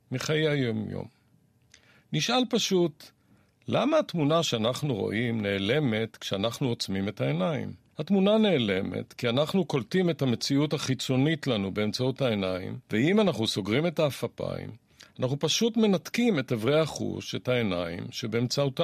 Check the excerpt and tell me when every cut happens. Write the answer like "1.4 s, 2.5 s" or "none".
7.9 s, 12.8 s